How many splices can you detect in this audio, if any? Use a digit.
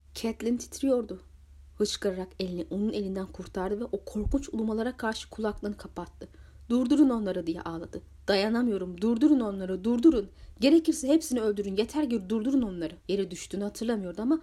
1